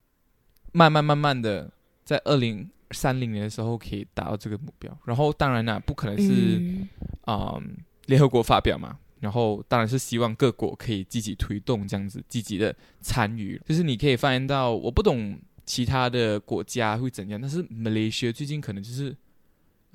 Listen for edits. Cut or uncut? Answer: cut